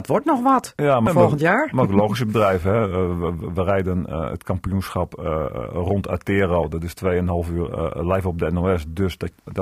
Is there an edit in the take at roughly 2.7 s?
no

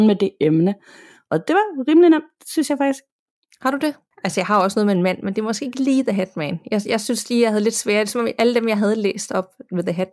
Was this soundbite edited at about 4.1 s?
yes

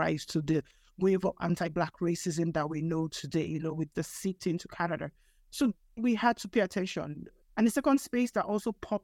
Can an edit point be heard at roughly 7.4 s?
yes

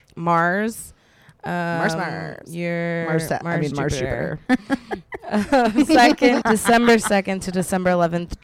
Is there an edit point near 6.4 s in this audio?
yes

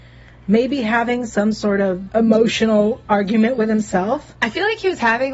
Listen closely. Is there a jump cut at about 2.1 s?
yes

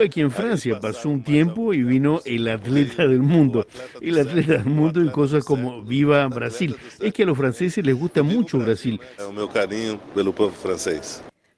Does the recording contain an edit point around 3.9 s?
no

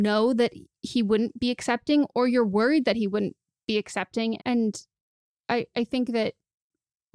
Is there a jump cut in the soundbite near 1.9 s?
no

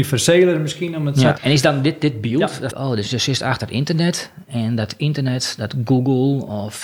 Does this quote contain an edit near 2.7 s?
yes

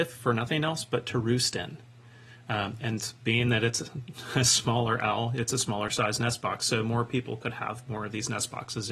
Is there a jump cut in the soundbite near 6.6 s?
no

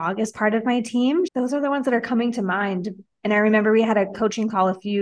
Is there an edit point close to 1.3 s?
yes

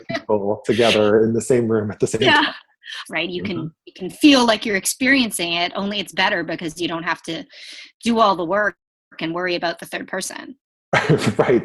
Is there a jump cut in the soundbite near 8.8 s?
no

